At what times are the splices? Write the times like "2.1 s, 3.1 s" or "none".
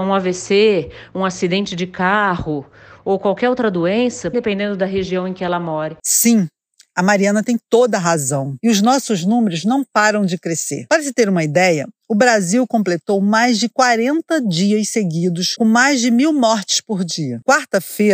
4.3 s